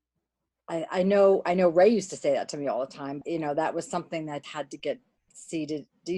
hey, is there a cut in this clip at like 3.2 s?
yes; 2 cuts; at 3.2 s, 4.4 s

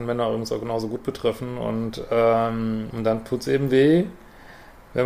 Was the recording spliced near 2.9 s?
yes; 1 cut; at 2.9 s

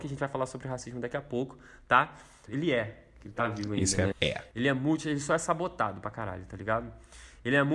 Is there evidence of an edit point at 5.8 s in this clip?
no; 2 cuts; at 2.5 s, 4.1 s

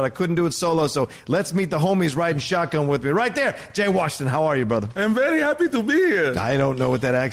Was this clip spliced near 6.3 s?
no; 0 cuts

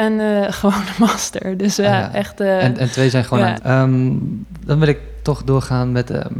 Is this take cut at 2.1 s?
no; 1 cut; at 3.6 s

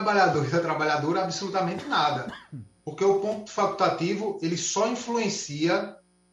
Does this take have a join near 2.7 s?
no; 0 cuts

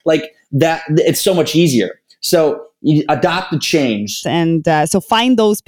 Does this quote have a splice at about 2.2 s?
no; 1 cut; at 4.2 s

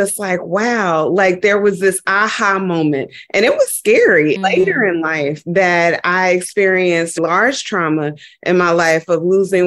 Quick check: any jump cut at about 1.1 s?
no; 2 cuts; at 4.4 s, 7.2 s

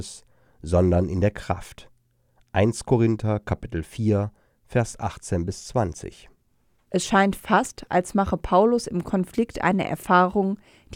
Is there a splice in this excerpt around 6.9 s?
yes; 1 cut; at 6.9 s

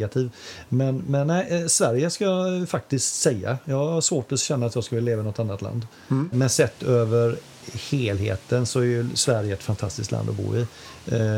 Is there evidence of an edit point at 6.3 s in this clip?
yes; 1 cut; at 6.3 s

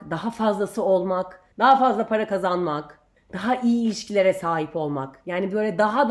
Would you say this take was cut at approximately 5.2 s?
no; 2 cuts; at 1.5 s, 3.2 s

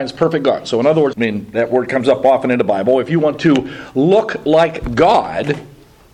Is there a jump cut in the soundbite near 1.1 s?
yes; 1 cut; at 1.1 s

